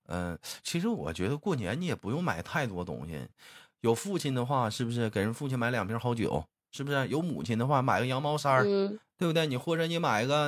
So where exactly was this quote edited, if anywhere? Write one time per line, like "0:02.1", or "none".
none